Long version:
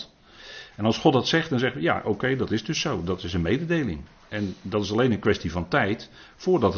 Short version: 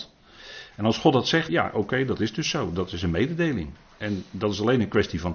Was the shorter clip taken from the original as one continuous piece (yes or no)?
no